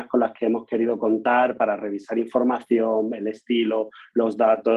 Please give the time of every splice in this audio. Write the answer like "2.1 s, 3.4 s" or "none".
none